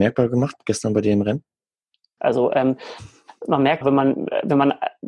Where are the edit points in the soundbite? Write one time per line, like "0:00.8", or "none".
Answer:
0:02.2
0:03.8